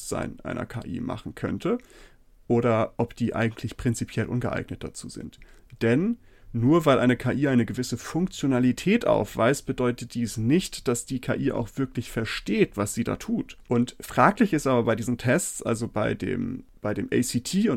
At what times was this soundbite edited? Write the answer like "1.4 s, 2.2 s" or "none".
13.6 s